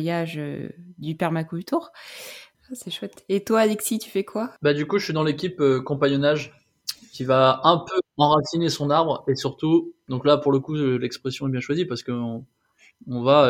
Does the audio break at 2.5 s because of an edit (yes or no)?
yes